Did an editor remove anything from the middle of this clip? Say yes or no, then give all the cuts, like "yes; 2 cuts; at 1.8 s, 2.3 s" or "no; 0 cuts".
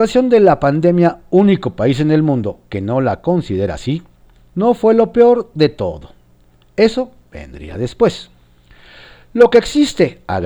no; 0 cuts